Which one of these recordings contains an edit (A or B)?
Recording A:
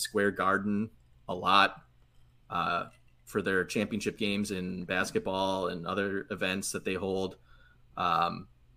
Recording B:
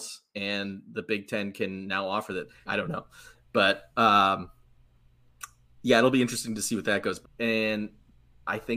B